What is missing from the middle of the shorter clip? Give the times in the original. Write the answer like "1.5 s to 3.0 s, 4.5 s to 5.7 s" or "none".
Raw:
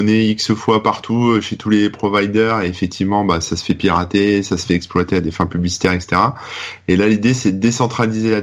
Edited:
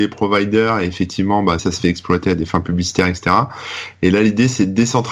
3.4 s to 4.4 s